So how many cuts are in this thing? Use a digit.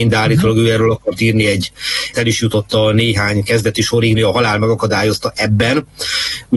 2